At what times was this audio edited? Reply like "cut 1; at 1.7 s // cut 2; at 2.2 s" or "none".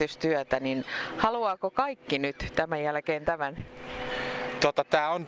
none

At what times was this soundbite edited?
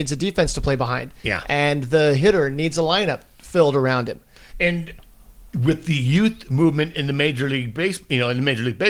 cut 1; at 4.5 s

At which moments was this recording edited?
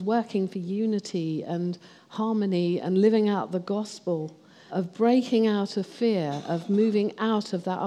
cut 1; at 4.7 s

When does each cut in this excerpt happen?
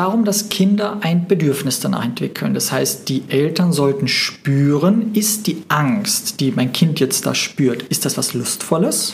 none

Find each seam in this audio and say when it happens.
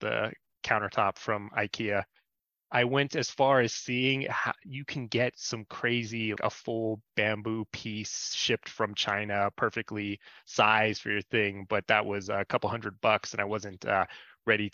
cut 1; at 2.6 s // cut 2; at 6.4 s

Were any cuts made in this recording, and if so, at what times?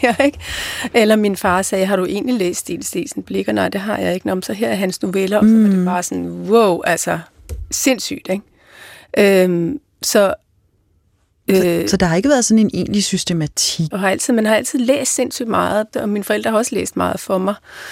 cut 1; at 13.9 s // cut 2; at 15.9 s

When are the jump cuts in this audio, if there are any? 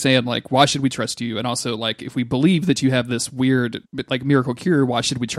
none

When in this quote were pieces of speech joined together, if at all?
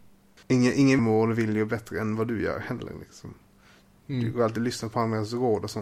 cut 1; at 1.0 s

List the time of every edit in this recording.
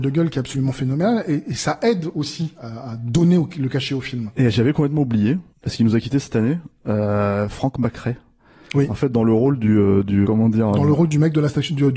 cut 1; at 5.5 s // cut 2; at 10.2 s

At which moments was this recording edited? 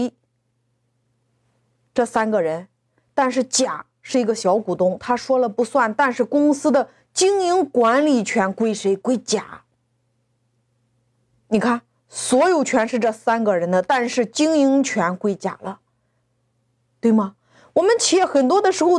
none

